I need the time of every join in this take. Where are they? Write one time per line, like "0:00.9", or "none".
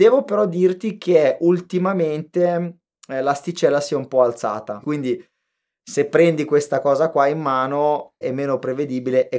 0:04.8
0:08.2